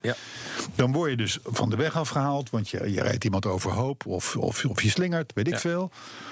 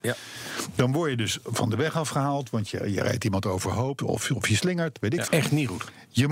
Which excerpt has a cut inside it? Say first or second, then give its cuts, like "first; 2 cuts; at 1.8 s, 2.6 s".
second; 2 cuts; at 4.0 s, 5.3 s